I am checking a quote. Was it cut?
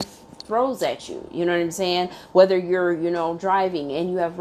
no; 0 cuts

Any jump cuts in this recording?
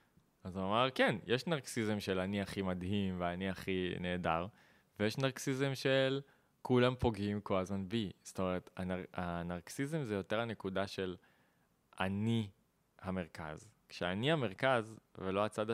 no; 0 cuts

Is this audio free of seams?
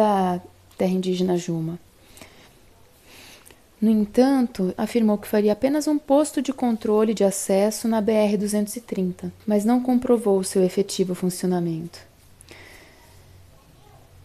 no; 3 cuts; at 2.4 s, 4.7 s, 9.4 s

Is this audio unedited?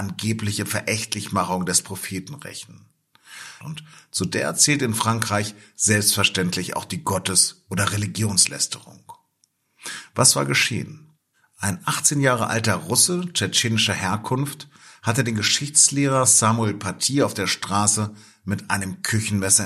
no; 1 cut; at 3.6 s

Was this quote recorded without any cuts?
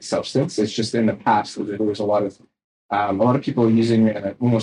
yes; 0 cuts

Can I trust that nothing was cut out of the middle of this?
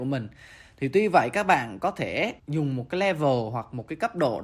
no; 1 cut; at 2.4 s

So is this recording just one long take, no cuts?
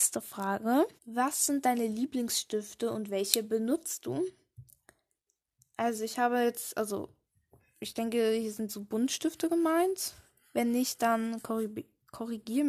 no; 1 cut; at 1.0 s

